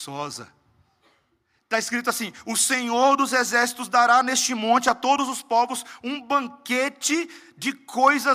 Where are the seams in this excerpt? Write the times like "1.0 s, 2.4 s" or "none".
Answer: 1.6 s